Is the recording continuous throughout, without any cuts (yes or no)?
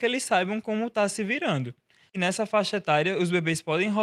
no